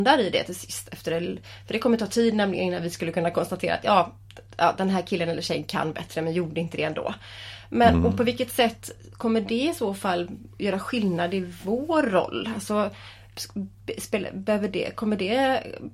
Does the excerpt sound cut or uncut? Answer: uncut